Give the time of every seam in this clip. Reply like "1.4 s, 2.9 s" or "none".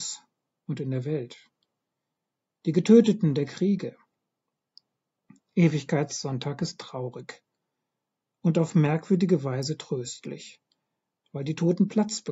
none